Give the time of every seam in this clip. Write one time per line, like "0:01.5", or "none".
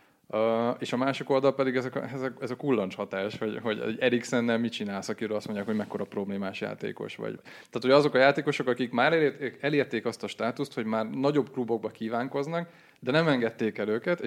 0:07.4